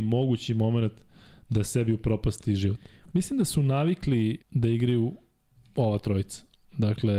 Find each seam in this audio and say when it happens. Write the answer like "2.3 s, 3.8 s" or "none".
3.1 s, 4.4 s